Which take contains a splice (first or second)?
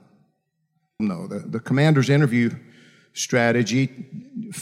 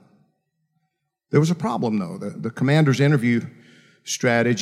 first